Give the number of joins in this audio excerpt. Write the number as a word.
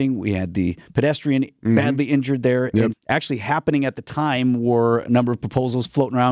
one